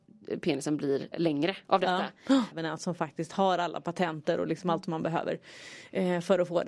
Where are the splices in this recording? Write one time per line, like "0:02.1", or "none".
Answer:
0:01.1
0:02.5